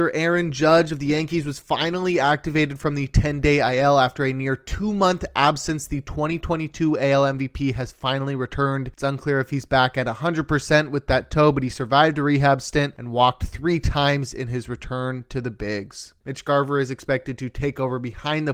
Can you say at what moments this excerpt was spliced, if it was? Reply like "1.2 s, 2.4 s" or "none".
16.2 s